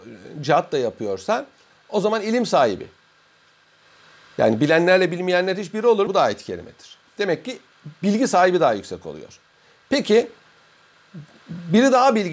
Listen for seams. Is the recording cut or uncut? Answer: cut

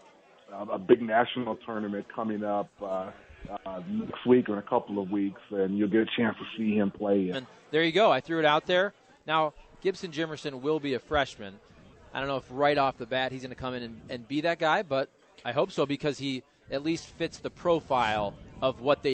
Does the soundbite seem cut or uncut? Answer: cut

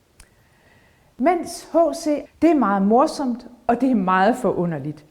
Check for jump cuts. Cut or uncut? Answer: cut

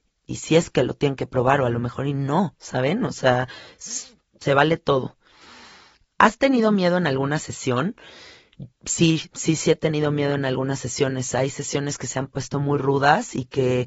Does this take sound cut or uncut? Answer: uncut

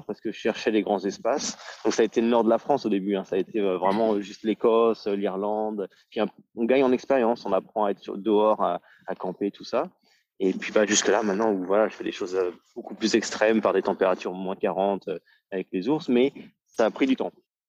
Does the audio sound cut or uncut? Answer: uncut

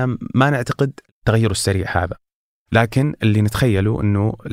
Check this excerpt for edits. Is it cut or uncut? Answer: uncut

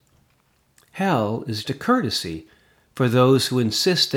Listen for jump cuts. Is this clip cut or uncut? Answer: cut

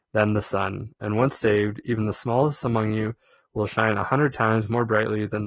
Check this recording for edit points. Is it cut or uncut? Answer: uncut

